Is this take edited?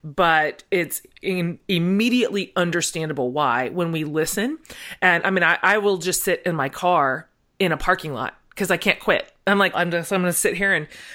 yes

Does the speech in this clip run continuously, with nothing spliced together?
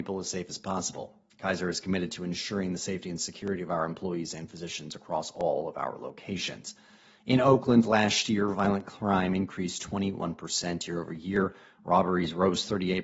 yes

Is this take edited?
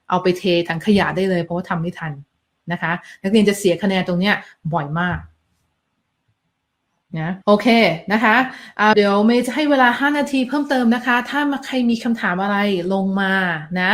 yes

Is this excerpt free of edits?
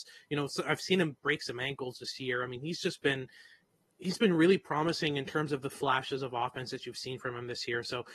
yes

